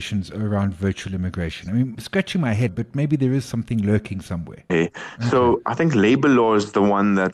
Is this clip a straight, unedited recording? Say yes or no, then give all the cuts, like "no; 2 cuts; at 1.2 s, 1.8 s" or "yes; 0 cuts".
no; 2 cuts; at 2.7 s, 4.7 s